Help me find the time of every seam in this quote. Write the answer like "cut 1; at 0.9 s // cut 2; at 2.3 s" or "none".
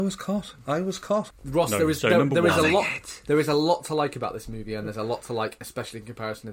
cut 1; at 1.3 s